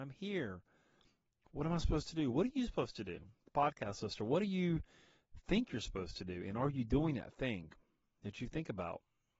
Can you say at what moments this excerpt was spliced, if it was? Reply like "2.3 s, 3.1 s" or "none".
none